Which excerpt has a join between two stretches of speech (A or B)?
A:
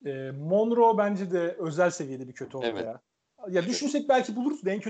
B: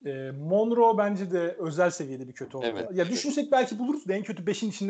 B